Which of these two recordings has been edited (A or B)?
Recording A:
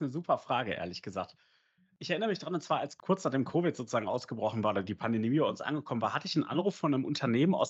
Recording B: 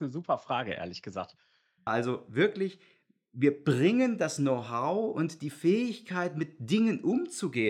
B